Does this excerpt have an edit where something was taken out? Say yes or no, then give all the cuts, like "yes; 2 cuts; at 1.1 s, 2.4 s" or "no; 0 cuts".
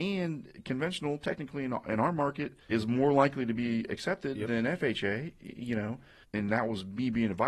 yes; 2 cuts; at 2.7 s, 6.2 s